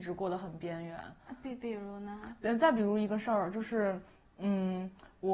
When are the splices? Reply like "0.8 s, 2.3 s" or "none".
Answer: none